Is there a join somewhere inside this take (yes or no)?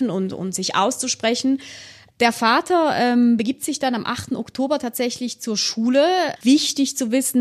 yes